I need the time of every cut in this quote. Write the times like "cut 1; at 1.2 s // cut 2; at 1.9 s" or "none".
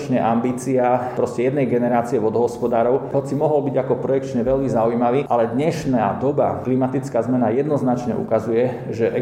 cut 1; at 3.1 s